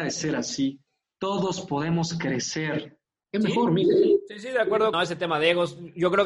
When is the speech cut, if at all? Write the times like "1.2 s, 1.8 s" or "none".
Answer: 3.2 s, 4.9 s